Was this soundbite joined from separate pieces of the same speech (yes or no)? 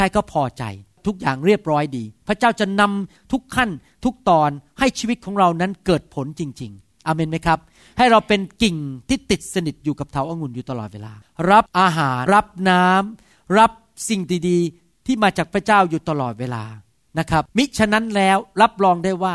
yes